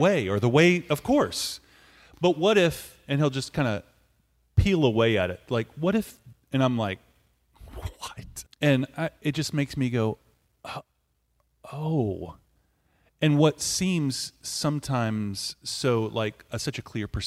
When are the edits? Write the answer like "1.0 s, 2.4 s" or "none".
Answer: 8.5 s